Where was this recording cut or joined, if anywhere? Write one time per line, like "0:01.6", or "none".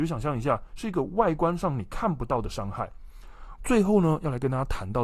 0:03.6